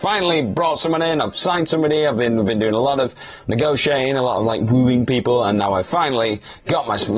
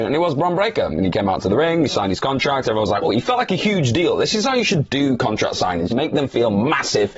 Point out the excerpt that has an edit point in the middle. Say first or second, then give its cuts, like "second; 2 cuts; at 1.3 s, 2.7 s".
second; 2 cuts; at 3.0 s, 5.9 s